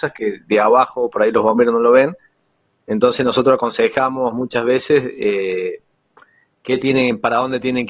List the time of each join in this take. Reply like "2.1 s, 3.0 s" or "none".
none

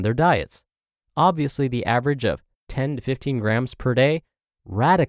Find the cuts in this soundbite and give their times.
1.0 s

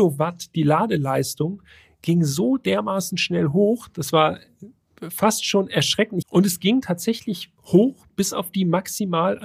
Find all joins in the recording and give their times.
6.2 s, 7.6 s

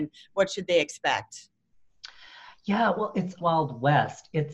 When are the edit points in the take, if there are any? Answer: 3.4 s

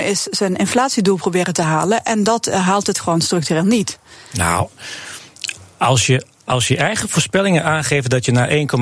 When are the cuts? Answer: none

